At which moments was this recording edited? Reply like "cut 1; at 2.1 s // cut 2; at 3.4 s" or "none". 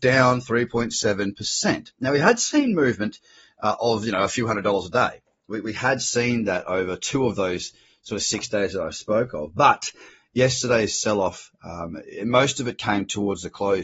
none